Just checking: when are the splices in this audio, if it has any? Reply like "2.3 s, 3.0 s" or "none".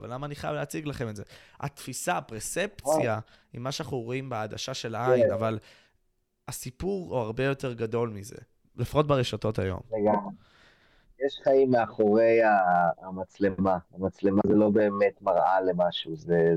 none